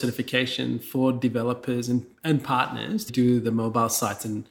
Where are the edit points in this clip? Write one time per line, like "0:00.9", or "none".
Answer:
0:03.1